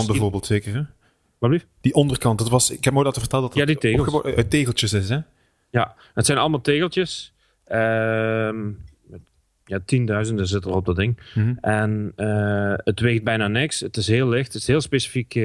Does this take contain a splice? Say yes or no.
no